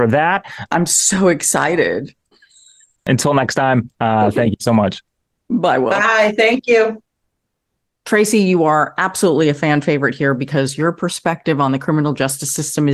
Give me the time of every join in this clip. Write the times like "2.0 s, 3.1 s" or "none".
2.3 s